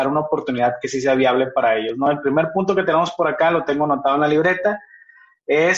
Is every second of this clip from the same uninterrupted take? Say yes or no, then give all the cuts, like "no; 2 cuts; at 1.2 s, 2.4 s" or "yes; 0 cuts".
yes; 0 cuts